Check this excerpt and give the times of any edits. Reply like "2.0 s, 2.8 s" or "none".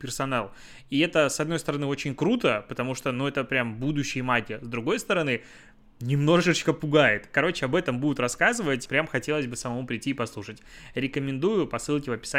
8.9 s